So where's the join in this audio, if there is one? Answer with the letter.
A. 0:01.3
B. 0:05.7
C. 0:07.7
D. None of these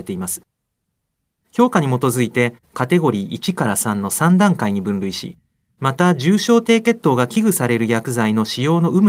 A